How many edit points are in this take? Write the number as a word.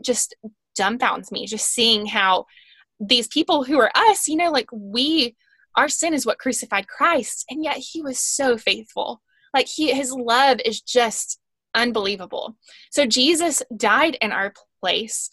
zero